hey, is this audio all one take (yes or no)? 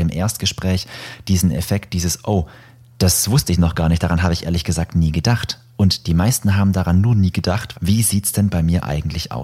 no